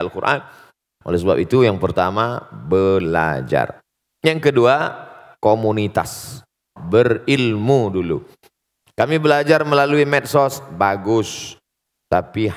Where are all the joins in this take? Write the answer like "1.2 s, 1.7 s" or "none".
6.8 s